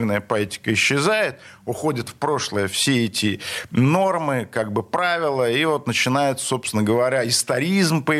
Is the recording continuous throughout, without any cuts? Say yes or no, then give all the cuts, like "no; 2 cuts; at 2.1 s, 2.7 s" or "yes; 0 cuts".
yes; 0 cuts